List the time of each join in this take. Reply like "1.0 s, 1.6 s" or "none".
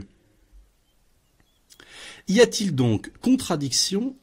none